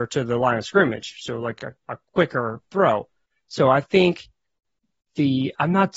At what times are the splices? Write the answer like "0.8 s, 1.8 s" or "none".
none